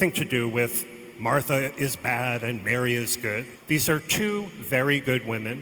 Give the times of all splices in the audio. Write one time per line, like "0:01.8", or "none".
0:03.6